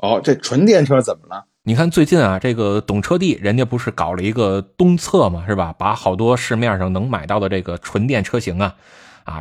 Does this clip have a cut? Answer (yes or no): no